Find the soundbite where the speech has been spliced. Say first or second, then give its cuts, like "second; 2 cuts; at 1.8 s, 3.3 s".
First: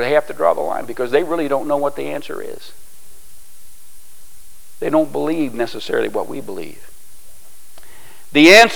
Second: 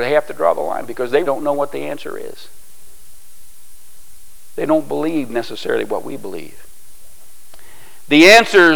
second; 1 cut; at 1.2 s